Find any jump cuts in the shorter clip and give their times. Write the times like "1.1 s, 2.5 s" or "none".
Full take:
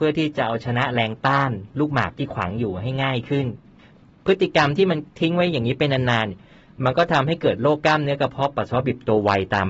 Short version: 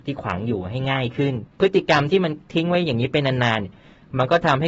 1.5 s